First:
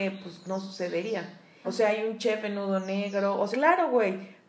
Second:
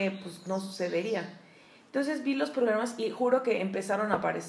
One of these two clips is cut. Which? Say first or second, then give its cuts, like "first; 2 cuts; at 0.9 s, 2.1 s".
first; 2 cuts; at 1.6 s, 3.5 s